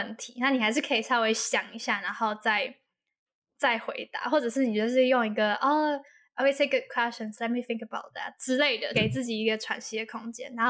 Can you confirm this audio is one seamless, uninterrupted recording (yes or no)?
no